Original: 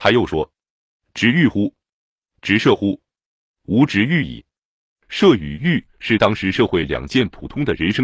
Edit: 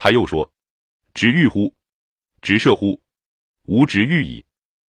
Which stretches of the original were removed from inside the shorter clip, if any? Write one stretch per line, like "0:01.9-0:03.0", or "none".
none